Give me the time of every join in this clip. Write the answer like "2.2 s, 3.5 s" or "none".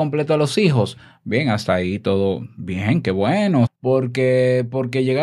3.7 s